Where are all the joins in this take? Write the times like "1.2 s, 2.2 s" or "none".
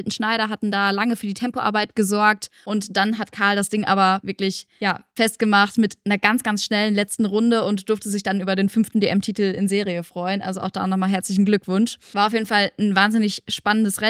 none